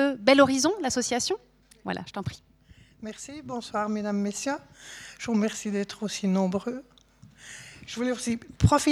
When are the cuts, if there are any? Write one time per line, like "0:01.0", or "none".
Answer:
none